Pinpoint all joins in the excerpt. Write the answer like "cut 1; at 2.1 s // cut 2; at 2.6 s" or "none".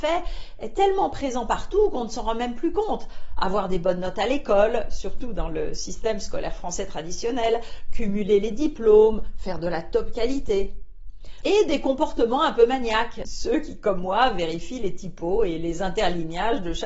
cut 1; at 11.4 s // cut 2; at 13.2 s